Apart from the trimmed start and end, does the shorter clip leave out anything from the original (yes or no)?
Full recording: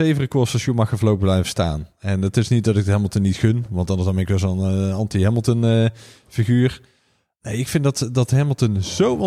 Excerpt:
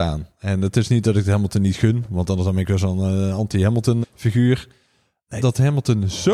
yes